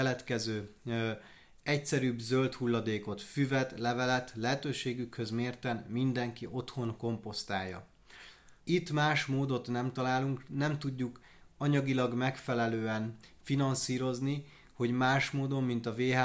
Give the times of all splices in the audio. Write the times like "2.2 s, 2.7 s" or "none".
8.6 s